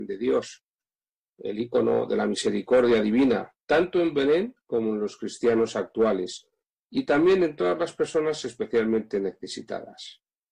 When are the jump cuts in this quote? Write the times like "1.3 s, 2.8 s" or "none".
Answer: 3.6 s

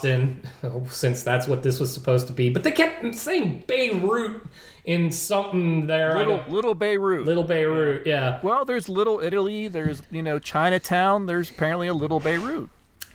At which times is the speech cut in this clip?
none

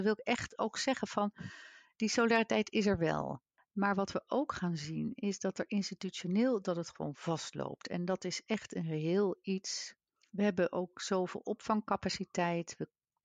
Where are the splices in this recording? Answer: none

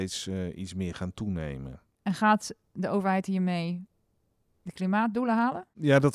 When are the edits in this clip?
none

